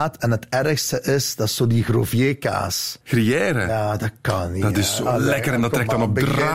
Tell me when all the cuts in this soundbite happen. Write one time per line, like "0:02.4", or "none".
0:03.0